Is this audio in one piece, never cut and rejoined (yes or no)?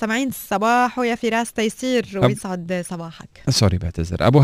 yes